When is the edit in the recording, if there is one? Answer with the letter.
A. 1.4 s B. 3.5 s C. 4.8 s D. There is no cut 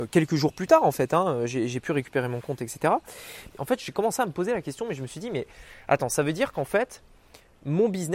B